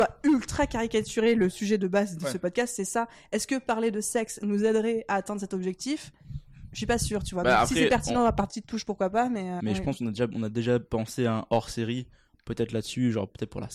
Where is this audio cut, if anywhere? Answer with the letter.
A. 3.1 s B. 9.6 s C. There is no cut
B